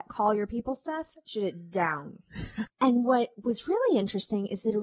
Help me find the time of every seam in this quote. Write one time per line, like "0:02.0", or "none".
0:02.7